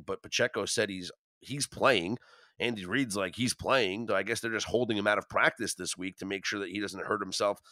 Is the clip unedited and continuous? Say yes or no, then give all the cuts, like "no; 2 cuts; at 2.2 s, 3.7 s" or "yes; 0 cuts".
no; 1 cut; at 4.1 s